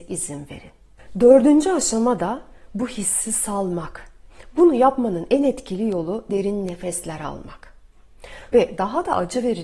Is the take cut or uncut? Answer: cut